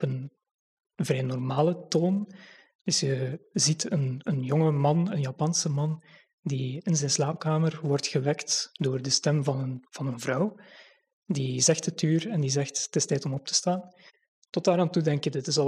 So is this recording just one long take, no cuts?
yes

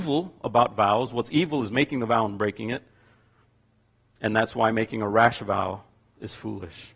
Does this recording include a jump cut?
no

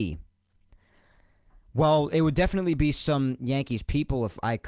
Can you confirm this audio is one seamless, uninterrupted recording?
yes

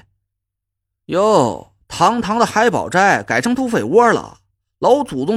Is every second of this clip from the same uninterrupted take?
yes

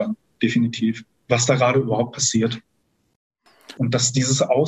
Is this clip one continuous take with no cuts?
no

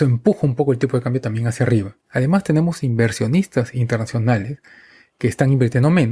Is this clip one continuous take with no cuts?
yes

